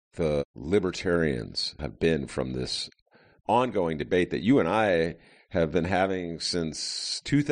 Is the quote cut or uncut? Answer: cut